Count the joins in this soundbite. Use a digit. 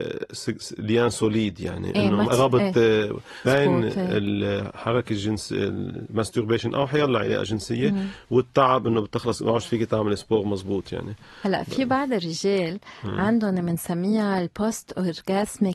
2